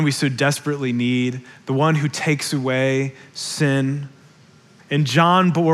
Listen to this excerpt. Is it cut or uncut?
cut